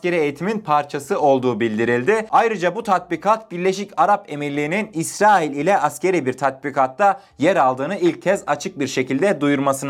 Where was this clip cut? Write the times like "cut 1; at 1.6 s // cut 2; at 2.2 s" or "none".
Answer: none